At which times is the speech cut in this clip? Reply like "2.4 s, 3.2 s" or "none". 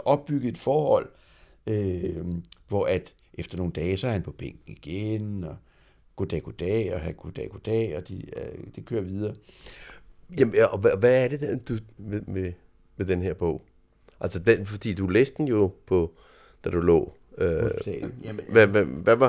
12.0 s, 18.0 s